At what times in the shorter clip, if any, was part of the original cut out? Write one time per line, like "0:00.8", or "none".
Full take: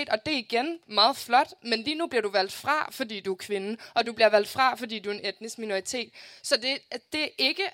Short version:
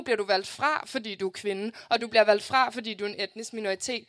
none